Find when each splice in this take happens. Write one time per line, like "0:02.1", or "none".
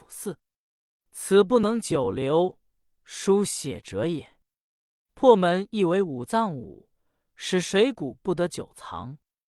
none